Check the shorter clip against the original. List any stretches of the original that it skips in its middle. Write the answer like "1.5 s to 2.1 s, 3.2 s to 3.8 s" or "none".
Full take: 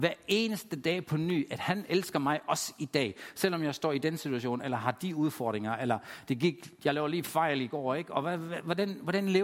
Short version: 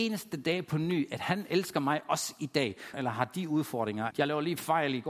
3.3 s to 4.6 s, 5.8 s to 6.8 s

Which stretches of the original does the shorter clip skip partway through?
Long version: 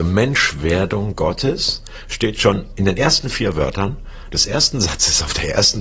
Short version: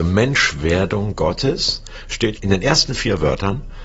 2.3 s to 2.7 s

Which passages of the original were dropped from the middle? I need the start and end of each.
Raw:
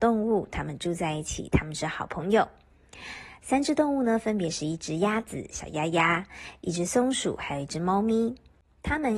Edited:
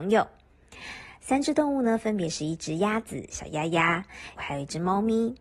6.6 s to 7.4 s

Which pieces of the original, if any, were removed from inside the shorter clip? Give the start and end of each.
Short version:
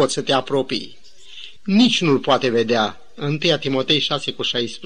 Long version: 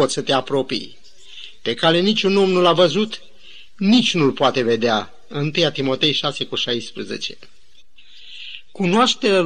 1.6 s to 3.7 s

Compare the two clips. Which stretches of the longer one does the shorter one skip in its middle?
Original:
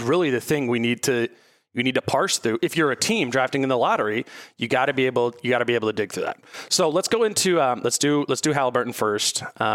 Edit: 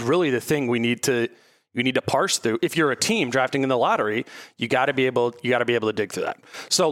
none

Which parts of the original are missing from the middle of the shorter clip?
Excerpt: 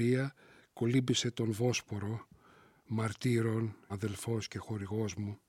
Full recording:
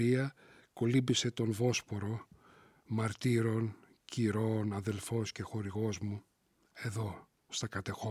3.9 s to 4.7 s

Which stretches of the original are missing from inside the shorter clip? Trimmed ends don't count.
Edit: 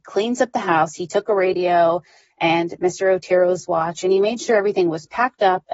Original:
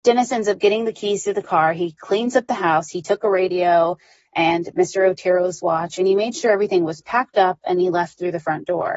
none

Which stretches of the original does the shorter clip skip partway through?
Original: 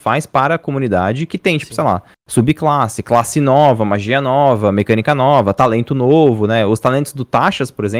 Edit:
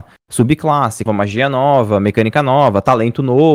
3.0 s to 3.8 s

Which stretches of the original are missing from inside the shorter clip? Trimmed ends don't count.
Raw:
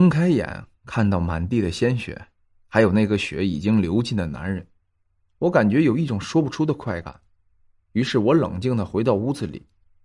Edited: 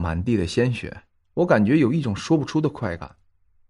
2.4 s to 5.2 s

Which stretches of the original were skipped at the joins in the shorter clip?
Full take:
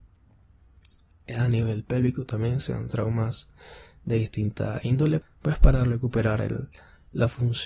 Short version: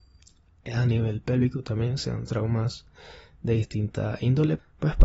none

